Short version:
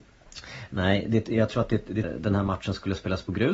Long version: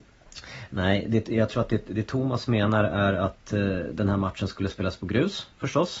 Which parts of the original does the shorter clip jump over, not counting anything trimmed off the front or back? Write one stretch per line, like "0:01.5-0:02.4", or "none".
0:02.0-0:03.8